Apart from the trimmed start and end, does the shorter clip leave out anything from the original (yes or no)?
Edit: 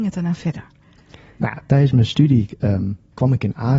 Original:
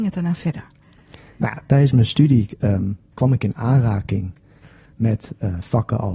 no